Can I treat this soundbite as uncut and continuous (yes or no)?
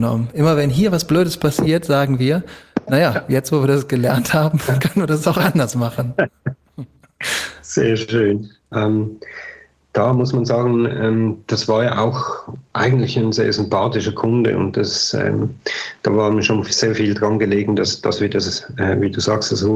no